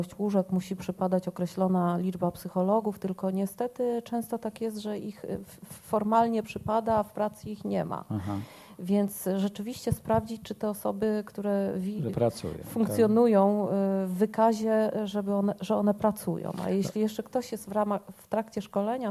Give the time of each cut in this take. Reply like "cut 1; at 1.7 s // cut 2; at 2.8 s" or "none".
none